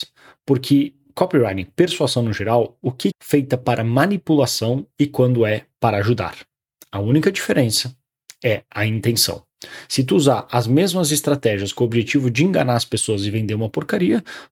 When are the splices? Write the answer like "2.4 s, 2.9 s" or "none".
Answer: 3.1 s